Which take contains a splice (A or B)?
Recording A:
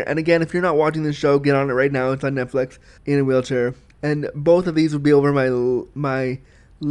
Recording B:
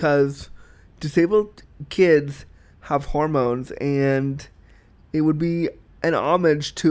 A